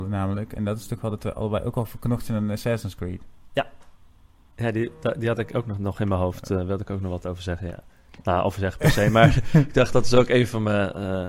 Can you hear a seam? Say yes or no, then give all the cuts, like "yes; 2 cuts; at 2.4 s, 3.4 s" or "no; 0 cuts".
no; 0 cuts